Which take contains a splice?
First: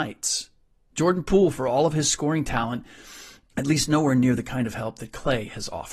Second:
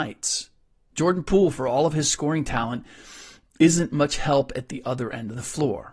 first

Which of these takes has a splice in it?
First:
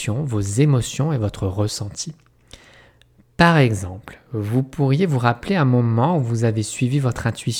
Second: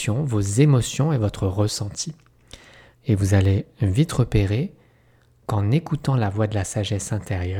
second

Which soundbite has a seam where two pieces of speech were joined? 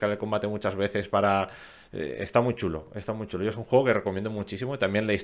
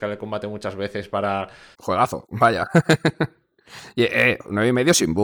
second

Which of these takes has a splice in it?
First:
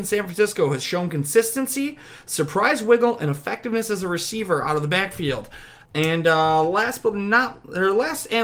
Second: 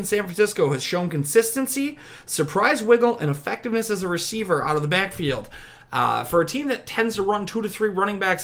first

